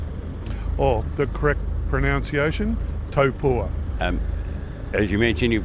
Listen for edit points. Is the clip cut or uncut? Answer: cut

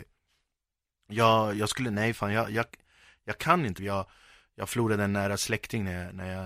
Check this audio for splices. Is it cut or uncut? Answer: cut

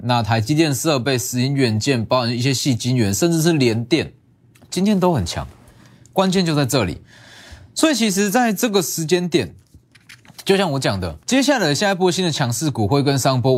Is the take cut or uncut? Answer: cut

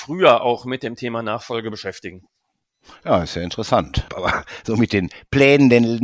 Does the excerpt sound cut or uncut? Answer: cut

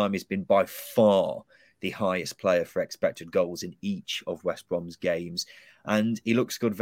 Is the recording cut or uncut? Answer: uncut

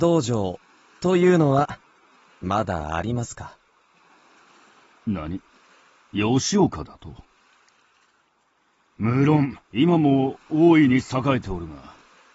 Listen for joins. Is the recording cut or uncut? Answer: cut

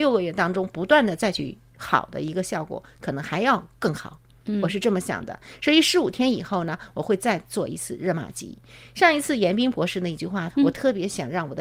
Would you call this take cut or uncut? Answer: cut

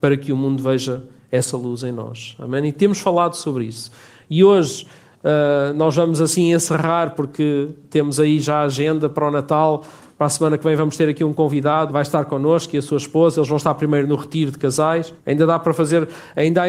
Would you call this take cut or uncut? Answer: cut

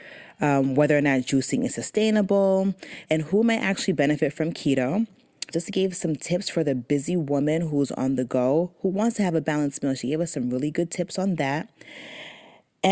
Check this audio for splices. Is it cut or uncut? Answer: cut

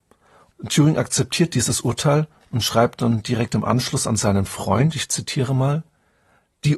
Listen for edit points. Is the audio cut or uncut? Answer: uncut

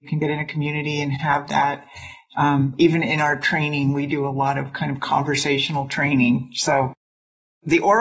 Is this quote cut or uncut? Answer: uncut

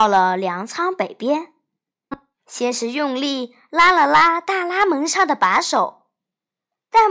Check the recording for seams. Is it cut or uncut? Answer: uncut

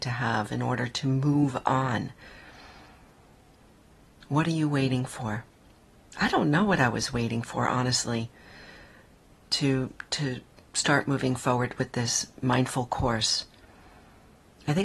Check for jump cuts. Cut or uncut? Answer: uncut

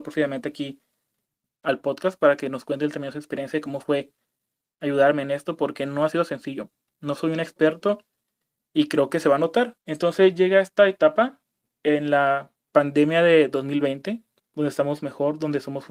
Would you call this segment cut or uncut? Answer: cut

